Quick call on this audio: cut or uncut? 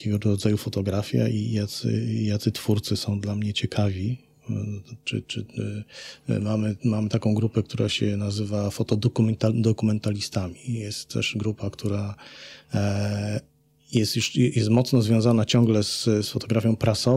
cut